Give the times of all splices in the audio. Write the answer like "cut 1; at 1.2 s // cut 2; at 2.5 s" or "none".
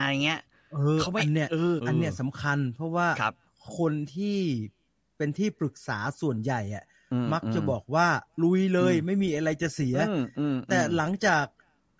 cut 1; at 1.8 s